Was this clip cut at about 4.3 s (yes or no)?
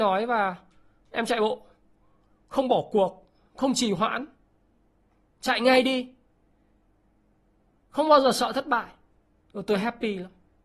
no